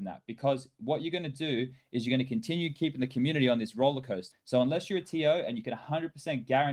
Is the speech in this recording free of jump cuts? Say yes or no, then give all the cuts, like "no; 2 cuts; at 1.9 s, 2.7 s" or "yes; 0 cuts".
no; 1 cut; at 4.3 s